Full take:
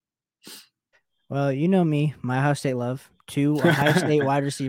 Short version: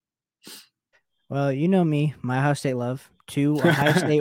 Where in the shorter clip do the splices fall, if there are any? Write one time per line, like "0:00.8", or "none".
none